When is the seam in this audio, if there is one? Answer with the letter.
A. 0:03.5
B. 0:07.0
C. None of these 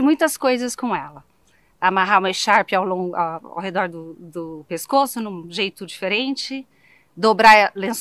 C